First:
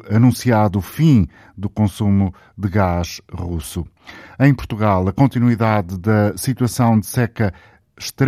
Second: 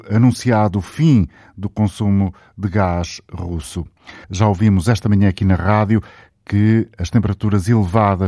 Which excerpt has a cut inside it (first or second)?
second